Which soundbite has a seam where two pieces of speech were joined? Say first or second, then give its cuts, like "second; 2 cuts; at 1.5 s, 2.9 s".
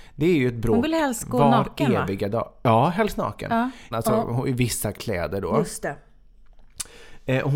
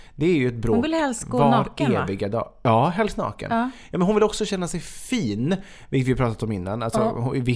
first; 1 cut; at 3.9 s